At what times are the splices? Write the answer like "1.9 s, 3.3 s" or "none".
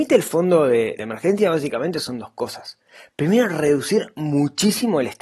1.0 s

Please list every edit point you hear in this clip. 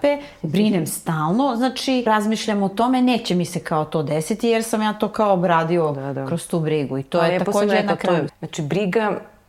2.1 s, 8.3 s

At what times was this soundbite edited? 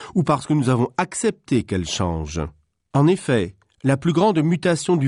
2.9 s

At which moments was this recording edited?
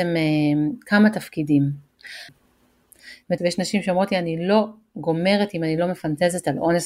2.3 s, 3.4 s

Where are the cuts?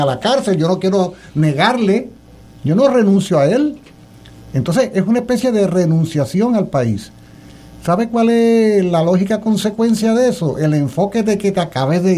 none

